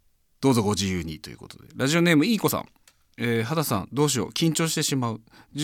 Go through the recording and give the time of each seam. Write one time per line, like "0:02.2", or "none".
none